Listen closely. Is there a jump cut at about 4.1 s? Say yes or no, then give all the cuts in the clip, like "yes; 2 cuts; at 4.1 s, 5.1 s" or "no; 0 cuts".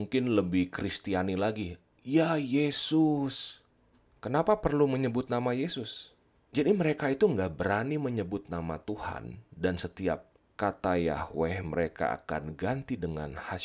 yes; 2 cuts; at 4.1 s, 6.4 s